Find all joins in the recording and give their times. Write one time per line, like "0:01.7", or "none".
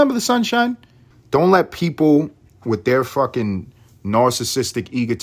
0:01.1